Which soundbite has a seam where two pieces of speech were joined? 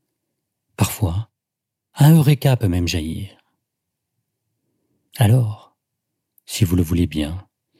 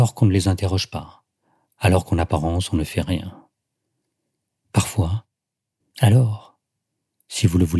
second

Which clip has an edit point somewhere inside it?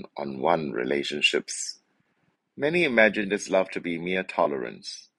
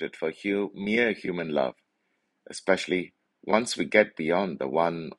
first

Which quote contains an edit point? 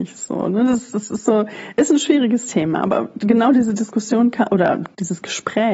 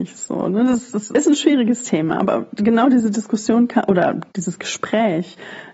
second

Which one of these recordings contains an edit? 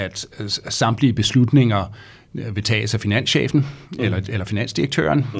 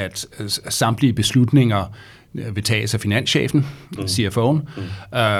second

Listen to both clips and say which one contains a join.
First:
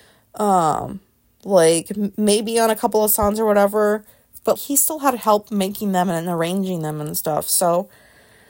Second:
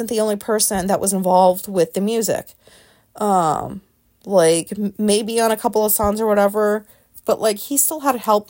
first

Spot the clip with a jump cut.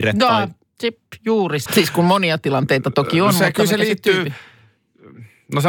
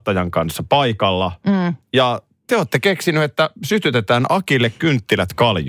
first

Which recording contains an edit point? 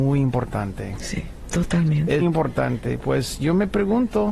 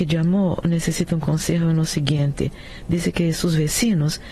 first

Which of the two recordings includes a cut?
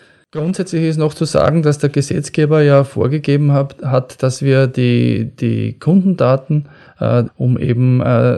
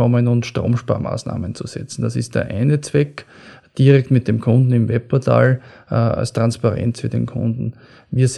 first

